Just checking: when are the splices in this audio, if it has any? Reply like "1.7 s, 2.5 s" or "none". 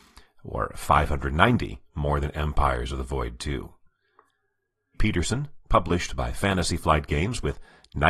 4.9 s